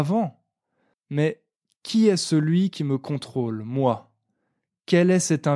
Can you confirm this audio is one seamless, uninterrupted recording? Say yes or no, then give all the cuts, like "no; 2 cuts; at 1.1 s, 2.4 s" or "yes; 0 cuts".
no; 1 cut; at 0.9 s